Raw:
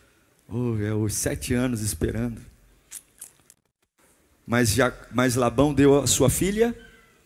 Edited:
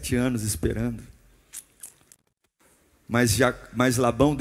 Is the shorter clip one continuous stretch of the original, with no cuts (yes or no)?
yes